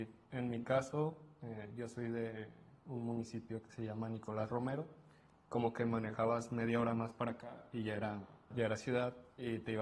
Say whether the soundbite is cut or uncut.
cut